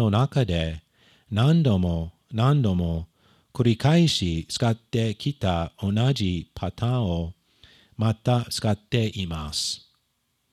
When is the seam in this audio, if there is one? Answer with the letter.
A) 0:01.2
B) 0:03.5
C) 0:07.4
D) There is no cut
D